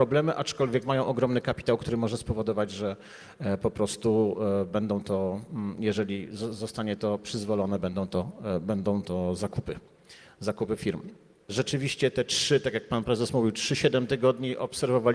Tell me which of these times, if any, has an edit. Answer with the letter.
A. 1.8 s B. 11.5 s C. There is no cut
B